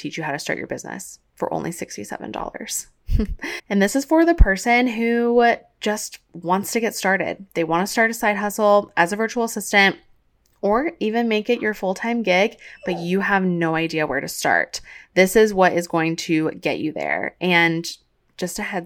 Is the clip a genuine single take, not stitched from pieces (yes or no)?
no